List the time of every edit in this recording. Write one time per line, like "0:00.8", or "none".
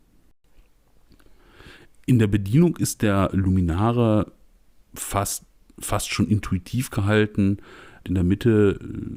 0:08.0